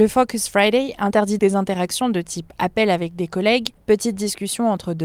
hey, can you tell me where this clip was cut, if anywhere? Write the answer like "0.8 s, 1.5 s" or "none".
1.4 s, 3.8 s